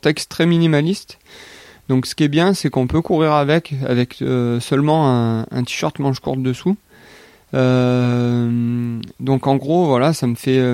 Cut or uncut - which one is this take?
uncut